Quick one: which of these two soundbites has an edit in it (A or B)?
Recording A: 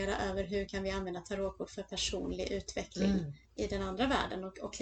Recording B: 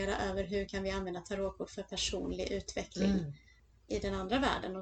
A